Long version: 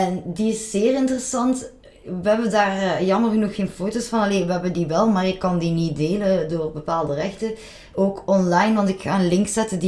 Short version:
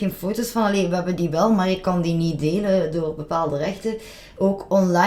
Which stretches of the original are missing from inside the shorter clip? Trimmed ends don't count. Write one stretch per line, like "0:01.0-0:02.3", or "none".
none